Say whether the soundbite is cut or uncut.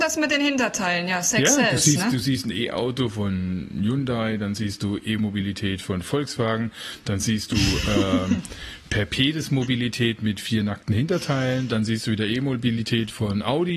uncut